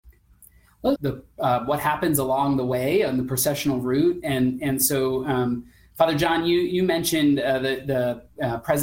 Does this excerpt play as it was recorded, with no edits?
no; 1 cut; at 1.0 s

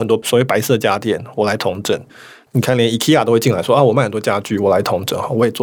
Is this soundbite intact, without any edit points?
yes; 0 cuts

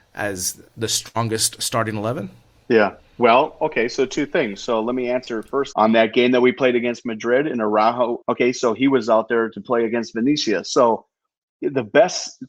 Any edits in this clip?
yes; 2 cuts; at 5.7 s, 8.2 s

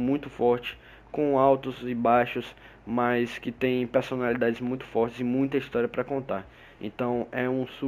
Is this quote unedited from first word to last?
yes; 0 cuts

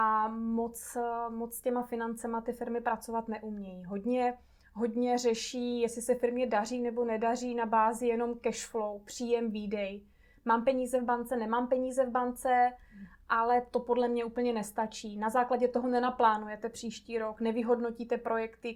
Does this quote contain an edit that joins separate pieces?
no; 0 cuts

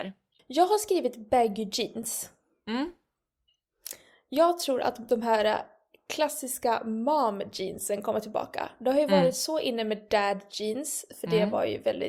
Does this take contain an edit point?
no; 0 cuts

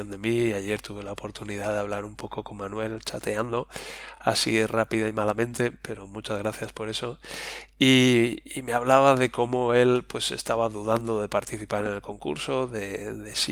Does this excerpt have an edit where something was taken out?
no; 0 cuts

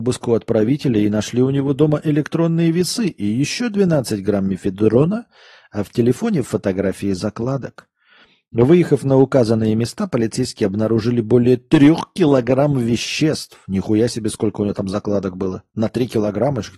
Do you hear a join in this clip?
no; 0 cuts

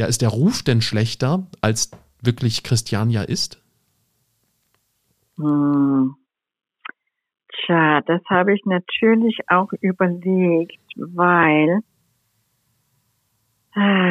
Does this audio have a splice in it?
no; 0 cuts

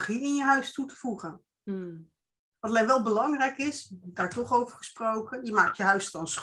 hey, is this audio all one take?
yes; 0 cuts

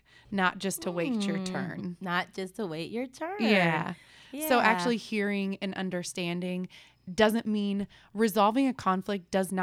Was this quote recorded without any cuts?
yes; 0 cuts

